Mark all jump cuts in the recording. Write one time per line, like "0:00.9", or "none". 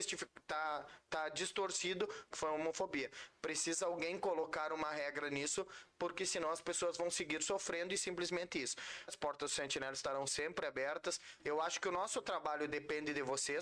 0:02.3
0:09.1
0:11.4